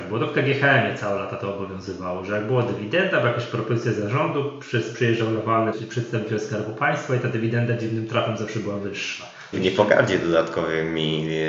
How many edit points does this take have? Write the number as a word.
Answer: two